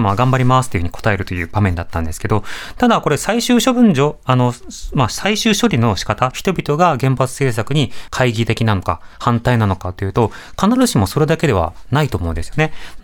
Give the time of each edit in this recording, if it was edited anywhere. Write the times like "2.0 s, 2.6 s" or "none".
6.3 s, 8.1 s